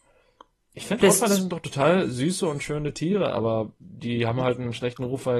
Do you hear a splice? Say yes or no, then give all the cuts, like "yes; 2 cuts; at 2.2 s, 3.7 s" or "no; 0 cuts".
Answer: no; 0 cuts